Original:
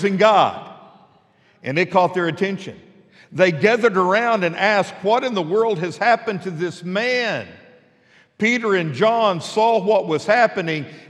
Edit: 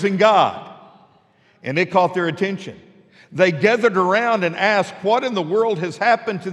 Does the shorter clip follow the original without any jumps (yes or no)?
yes